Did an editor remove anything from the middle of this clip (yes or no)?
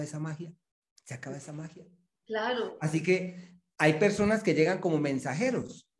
no